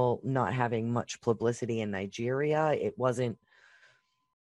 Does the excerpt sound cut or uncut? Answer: uncut